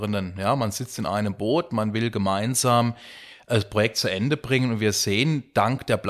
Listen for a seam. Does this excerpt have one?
no; 0 cuts

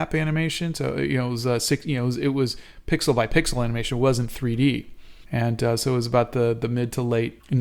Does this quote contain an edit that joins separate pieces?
yes; 1 cut; at 5.2 s

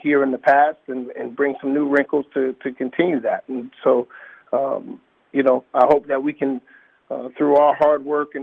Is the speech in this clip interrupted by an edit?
no; 0 cuts

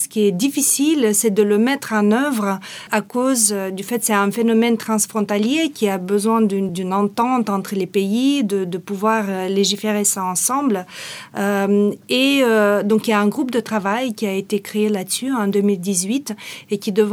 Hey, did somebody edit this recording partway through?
yes; 1 cut; at 6.7 s

